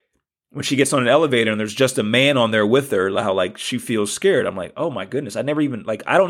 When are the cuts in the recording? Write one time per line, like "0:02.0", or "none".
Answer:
none